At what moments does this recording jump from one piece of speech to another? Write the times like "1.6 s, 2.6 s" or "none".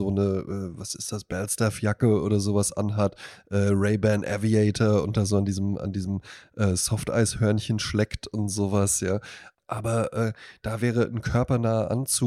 9.5 s